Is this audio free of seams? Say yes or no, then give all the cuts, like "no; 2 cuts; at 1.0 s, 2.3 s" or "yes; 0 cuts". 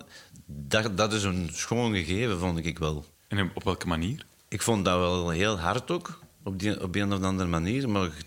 no; 1 cut; at 3.1 s